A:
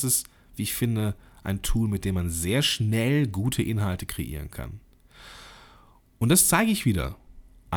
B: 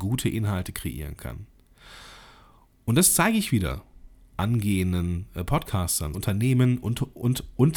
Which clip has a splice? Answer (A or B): B